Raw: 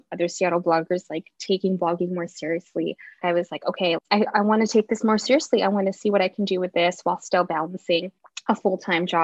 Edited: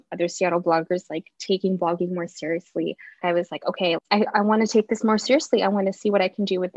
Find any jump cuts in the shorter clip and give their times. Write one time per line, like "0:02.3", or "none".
none